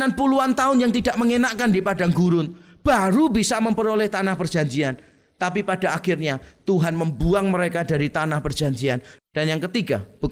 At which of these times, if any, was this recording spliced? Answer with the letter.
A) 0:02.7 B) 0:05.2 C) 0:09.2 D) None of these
C